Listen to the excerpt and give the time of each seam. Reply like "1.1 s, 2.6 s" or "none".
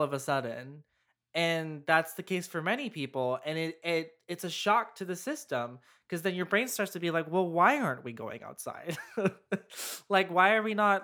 none